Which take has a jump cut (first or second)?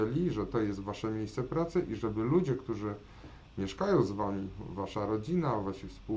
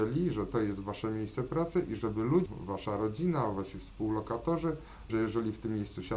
second